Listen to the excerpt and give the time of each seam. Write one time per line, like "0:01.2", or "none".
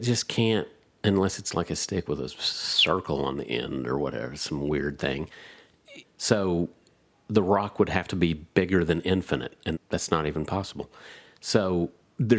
0:06.0
0:09.7